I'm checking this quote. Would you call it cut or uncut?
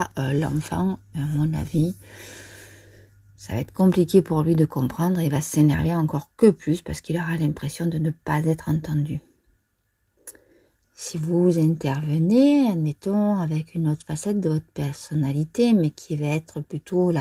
uncut